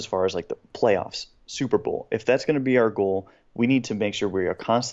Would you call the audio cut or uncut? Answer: uncut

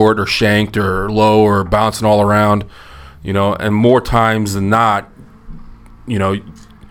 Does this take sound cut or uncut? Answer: uncut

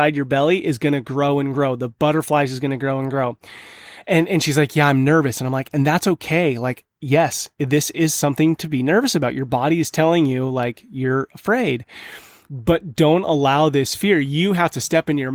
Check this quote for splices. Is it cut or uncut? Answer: uncut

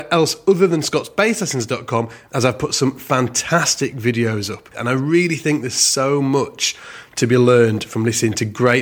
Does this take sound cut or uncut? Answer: cut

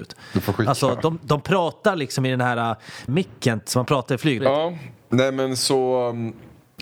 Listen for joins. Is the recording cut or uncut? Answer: cut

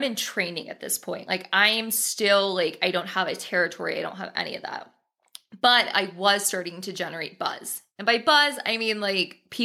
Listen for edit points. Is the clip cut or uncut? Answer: uncut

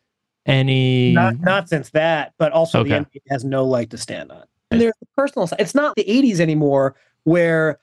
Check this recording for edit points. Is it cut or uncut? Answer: cut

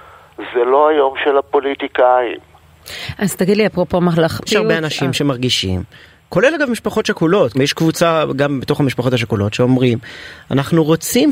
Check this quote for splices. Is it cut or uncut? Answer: cut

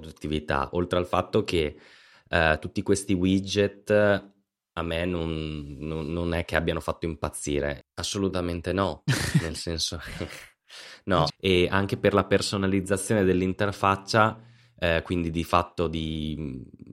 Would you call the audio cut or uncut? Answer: cut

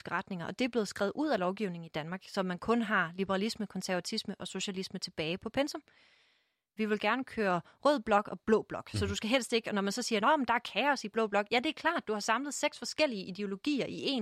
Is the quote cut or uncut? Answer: cut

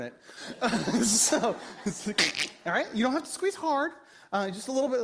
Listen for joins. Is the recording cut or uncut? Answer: uncut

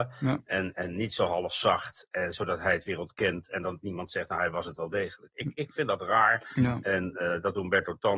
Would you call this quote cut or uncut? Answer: uncut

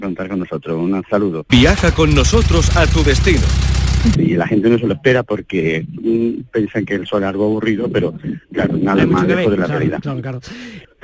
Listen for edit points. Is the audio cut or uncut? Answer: cut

